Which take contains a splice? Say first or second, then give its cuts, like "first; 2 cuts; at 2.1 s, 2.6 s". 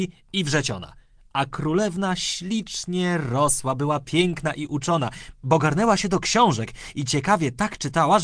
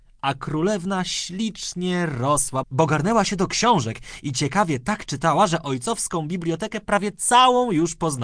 second; 1 cut; at 2.6 s